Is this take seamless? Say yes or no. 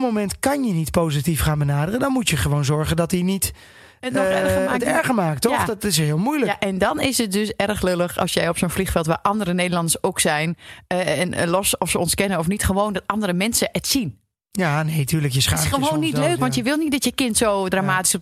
yes